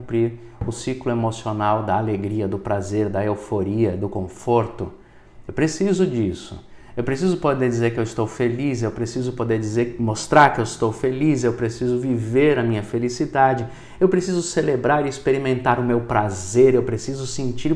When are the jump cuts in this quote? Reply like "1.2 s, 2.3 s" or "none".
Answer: none